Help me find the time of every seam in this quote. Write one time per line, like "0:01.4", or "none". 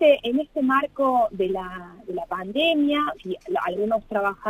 0:03.1